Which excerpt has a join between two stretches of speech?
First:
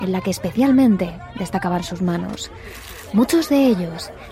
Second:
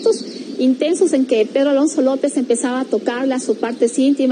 first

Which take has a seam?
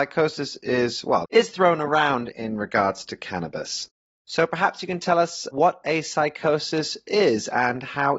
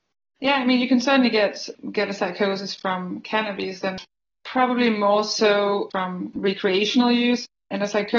first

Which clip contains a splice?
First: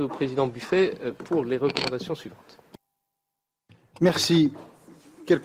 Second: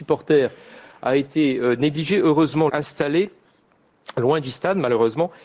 second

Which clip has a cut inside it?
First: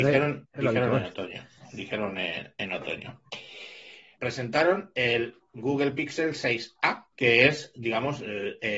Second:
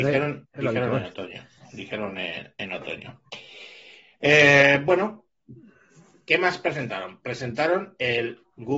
first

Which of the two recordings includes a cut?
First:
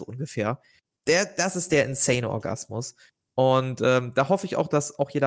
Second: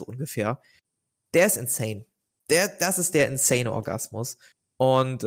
first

